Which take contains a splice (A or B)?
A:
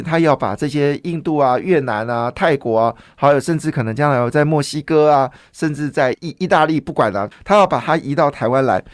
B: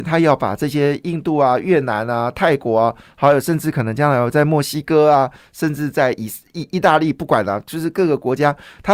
A